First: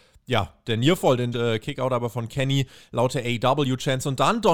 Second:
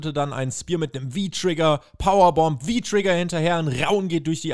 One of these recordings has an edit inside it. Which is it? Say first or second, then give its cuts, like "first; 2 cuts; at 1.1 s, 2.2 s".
first; 1 cut; at 1.3 s